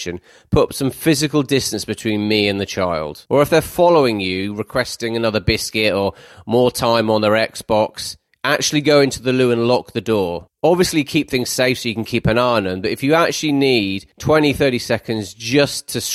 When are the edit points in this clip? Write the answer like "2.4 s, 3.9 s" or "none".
3.3 s